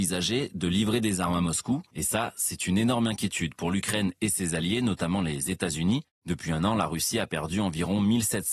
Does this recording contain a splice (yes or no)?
no